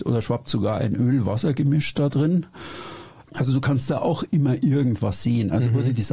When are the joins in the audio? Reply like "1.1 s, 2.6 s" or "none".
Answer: 3.3 s